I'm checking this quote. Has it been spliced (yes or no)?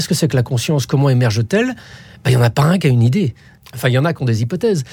no